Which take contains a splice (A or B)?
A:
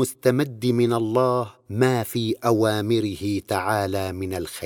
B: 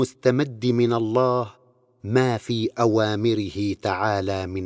A